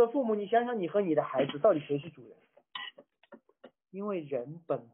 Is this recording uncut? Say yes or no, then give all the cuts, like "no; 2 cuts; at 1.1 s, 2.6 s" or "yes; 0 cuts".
no; 1 cut; at 3.7 s